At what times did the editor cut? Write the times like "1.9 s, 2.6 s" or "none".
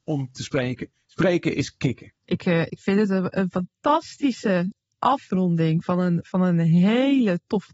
2.2 s